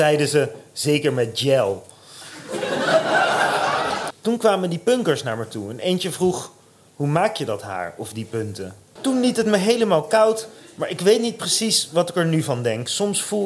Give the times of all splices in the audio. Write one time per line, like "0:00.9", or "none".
0:04.1
0:09.0